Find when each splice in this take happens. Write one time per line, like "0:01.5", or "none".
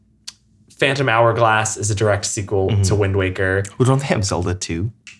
none